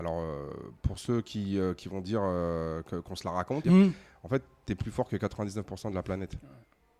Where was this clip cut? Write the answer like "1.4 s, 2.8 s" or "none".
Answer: 3.6 s